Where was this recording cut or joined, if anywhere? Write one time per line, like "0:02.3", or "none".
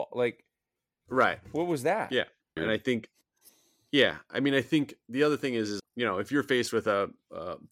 0:02.6
0:05.8